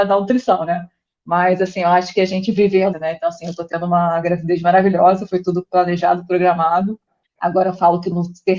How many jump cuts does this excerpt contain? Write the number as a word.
two